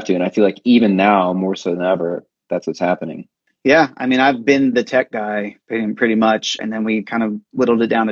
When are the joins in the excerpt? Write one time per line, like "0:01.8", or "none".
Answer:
0:06.6